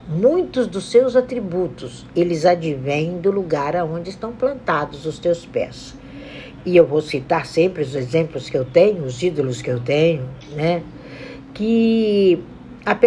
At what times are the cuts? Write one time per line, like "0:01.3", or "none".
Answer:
0:06.6